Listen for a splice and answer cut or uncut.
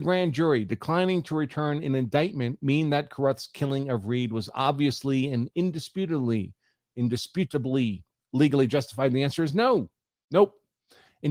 uncut